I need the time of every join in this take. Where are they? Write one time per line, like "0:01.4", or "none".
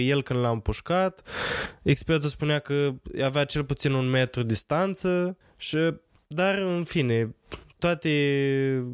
none